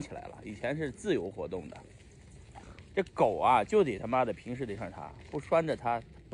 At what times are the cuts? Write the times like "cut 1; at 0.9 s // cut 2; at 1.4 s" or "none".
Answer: cut 1; at 4.8 s